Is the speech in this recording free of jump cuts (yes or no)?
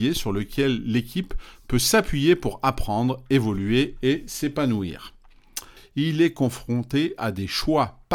no